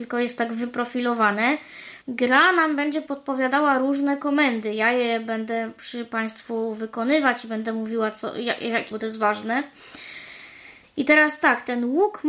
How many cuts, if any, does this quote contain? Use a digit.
2